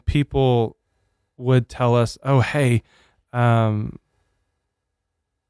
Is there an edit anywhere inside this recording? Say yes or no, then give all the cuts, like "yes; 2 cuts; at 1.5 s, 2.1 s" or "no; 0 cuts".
no; 0 cuts